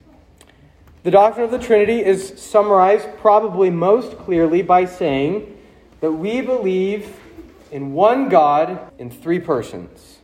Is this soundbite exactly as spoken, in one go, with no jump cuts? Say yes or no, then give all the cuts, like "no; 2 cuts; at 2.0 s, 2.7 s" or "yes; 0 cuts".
no; 1 cut; at 8.9 s